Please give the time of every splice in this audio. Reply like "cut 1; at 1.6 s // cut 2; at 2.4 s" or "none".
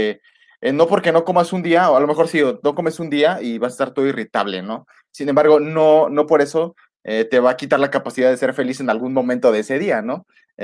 none